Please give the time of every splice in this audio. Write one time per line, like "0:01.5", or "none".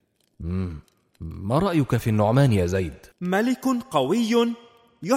0:03.1